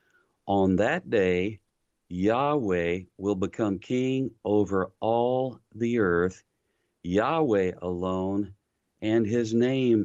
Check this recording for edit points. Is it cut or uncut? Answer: uncut